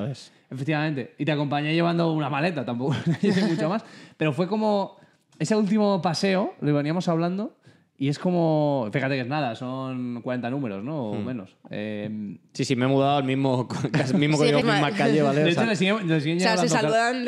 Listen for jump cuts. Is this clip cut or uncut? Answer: cut